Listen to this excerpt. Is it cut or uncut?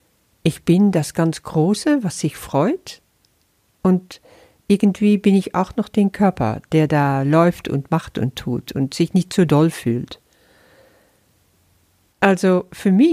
cut